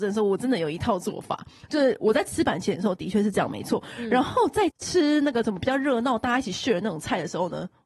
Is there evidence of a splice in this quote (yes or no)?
no